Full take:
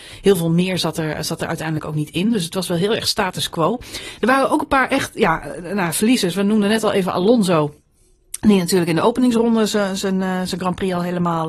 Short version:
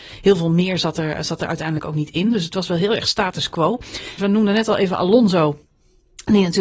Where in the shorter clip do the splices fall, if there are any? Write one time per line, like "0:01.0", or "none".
0:04.2